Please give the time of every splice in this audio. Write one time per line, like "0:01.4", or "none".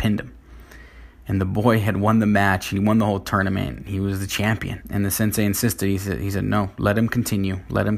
0:04.8